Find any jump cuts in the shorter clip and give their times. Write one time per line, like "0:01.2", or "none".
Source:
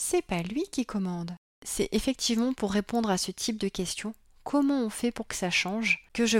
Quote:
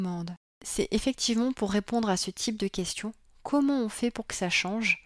none